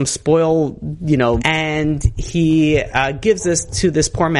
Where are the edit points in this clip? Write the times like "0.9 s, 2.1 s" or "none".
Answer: 1.4 s